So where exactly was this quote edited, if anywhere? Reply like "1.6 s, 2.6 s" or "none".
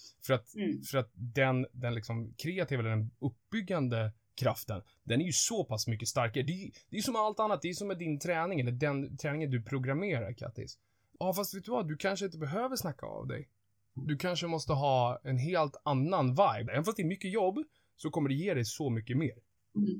11.1 s, 16.7 s